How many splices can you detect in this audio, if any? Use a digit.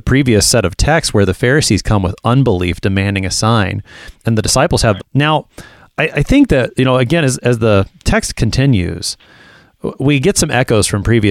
1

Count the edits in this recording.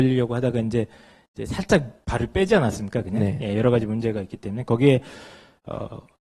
0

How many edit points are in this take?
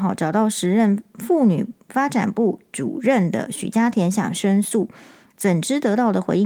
0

